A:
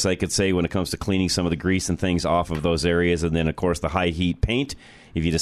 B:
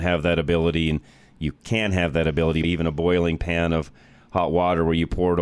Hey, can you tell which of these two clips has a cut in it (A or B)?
B